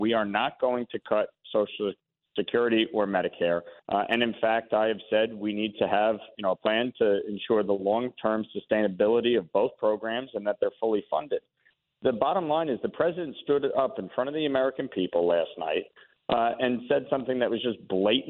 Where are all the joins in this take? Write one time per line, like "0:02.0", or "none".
0:03.8
0:06.3